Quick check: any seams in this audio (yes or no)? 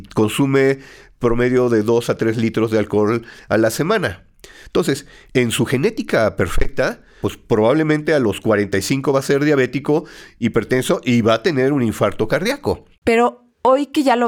yes